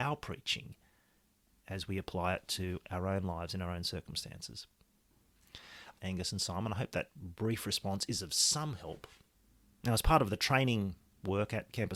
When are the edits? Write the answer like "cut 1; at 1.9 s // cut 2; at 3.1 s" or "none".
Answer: cut 1; at 6.0 s